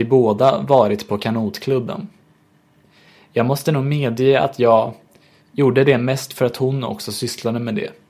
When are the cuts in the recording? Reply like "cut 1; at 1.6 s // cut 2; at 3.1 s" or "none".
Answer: cut 1; at 5.4 s